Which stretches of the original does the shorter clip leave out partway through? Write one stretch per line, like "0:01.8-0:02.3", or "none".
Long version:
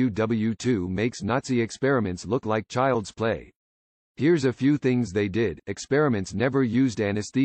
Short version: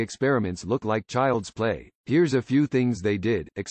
0:03.6-0:04.1